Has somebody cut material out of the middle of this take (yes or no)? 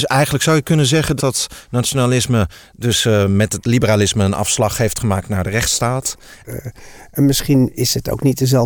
yes